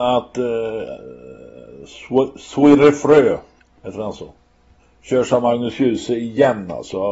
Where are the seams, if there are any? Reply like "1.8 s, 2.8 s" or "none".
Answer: none